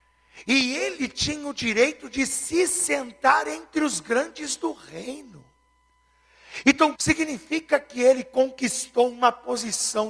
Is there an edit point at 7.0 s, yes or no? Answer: yes